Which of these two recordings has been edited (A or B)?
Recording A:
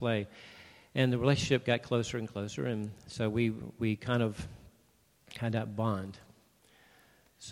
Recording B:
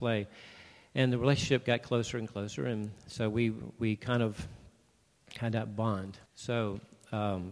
B